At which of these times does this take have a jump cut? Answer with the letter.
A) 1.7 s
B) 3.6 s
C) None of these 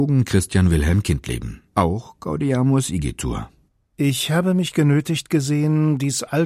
A